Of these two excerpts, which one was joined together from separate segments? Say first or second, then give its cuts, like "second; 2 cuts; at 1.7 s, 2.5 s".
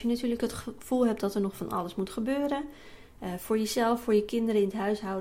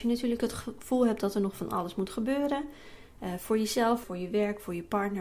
second; 1 cut; at 4.0 s